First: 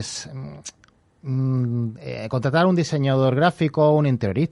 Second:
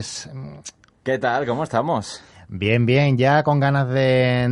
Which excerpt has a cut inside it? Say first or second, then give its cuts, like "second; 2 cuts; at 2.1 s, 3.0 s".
second; 1 cut; at 1.0 s